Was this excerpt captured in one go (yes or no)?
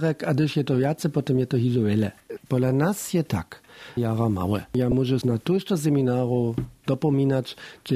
no